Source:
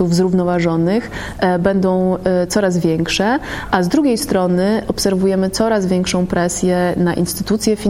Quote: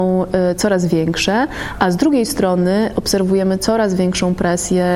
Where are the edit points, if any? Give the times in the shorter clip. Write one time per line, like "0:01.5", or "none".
none